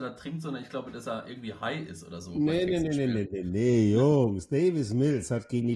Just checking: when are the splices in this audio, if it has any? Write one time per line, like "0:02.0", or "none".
none